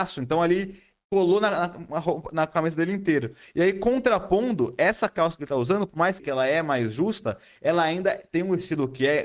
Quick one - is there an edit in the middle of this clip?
yes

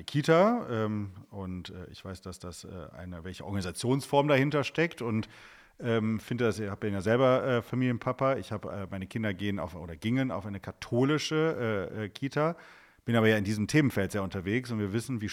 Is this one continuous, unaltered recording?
yes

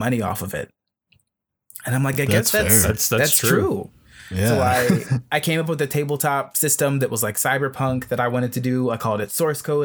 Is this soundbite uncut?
yes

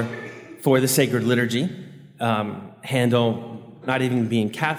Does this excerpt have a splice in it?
yes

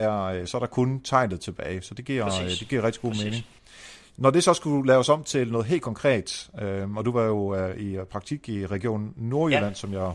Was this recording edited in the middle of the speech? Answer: no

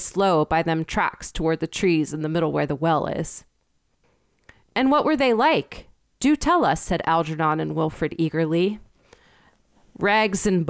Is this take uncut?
yes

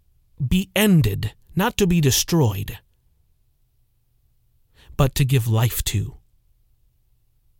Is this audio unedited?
yes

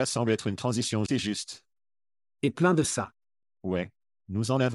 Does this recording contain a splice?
yes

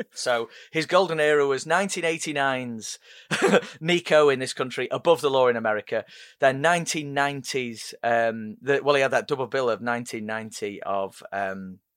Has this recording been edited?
no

